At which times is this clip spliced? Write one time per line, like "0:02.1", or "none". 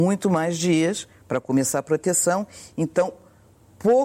none

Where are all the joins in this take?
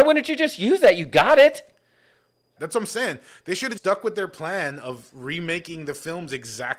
0:02.6
0:03.8

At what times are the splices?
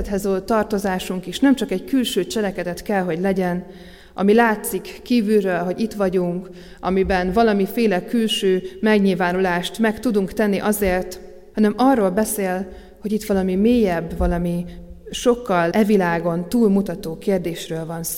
0:11.5
0:15.7

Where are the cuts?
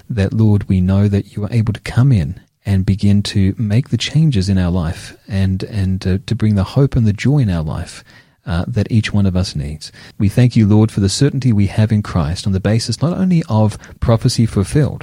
0:10.1
0:14.0

